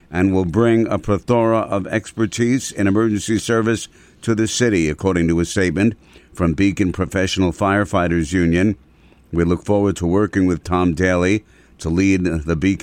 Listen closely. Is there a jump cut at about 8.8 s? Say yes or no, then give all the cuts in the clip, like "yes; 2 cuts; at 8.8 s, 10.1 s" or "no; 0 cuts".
no; 0 cuts